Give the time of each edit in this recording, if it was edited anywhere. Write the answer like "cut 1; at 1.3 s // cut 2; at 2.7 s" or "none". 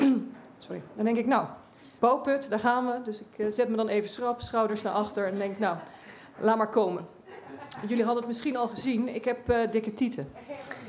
cut 1; at 2.0 s